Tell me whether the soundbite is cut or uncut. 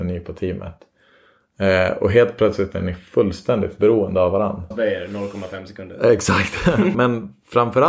cut